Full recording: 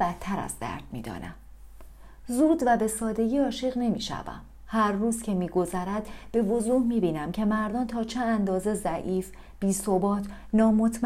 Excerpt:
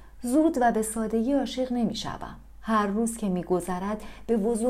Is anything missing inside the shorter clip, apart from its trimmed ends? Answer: no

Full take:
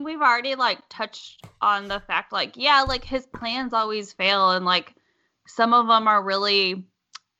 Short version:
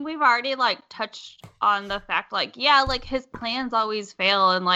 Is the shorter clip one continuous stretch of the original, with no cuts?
yes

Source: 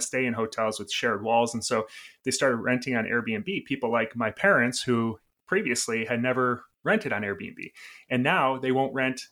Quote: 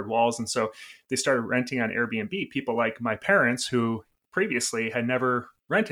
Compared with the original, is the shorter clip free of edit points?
yes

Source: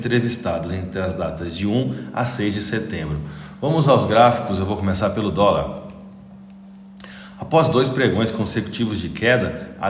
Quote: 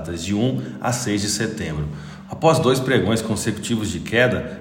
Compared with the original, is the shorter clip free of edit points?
no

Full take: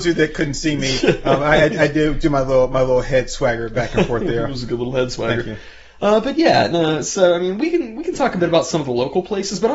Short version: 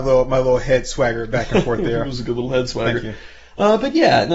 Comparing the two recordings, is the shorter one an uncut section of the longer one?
yes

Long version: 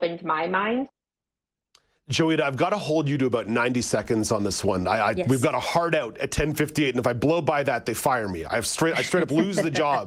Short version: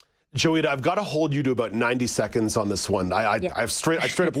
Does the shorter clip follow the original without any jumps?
no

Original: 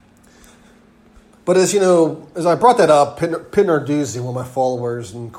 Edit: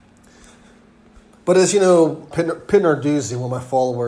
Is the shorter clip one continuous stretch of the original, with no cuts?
no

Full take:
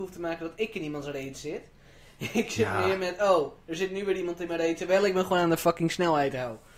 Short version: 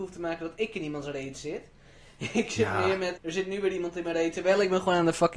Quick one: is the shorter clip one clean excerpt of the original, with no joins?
no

